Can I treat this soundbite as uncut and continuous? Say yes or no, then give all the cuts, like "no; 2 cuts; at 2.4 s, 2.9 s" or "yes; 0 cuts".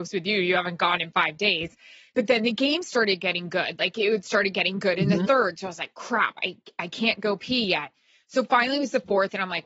yes; 0 cuts